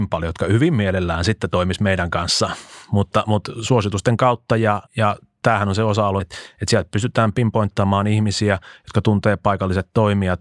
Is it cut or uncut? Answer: cut